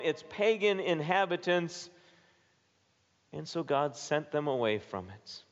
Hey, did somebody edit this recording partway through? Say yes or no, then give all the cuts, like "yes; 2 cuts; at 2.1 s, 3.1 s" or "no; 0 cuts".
no; 0 cuts